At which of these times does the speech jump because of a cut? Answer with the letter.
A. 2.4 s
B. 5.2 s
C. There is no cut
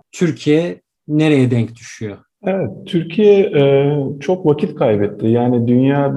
A